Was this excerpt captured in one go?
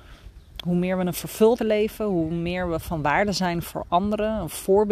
no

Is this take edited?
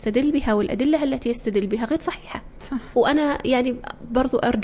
yes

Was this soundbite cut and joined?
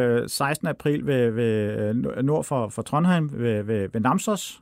yes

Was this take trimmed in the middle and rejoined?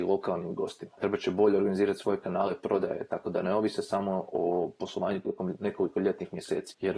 no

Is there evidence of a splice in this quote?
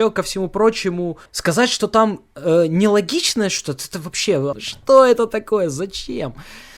yes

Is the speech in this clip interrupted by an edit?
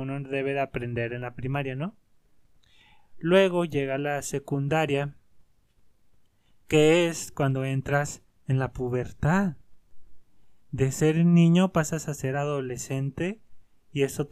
no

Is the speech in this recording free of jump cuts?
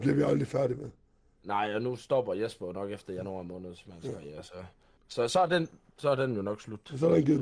yes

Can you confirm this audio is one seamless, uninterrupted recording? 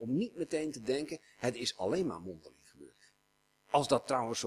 yes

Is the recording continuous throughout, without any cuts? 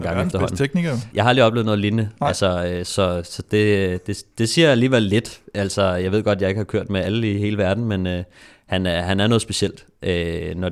no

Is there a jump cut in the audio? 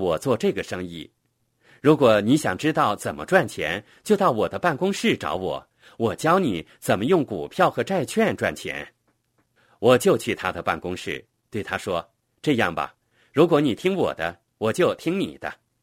no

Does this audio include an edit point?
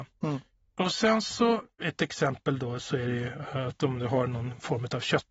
no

